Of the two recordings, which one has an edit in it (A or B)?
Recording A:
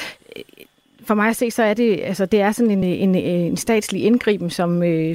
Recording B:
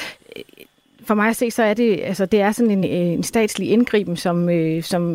B